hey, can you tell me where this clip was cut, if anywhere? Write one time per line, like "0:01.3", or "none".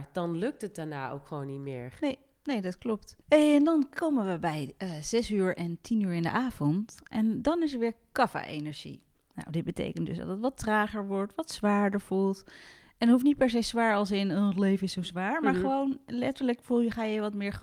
0:03.2